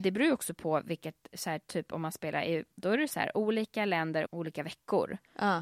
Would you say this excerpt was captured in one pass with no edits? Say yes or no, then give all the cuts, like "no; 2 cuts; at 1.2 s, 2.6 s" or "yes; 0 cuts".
no; 2 cuts; at 2.8 s, 4.3 s